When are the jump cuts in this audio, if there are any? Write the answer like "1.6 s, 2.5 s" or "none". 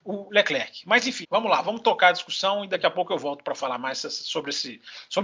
1.2 s